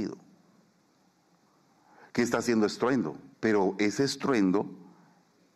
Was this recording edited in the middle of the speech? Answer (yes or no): yes